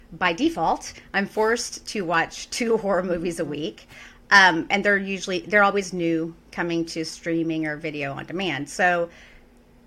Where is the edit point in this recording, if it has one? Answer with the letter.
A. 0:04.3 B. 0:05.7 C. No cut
C